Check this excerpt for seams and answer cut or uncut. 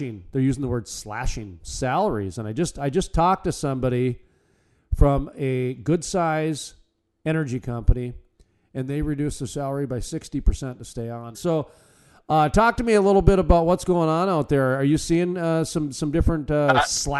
cut